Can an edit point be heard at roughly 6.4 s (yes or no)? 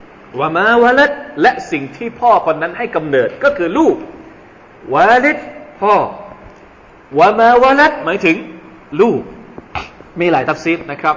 no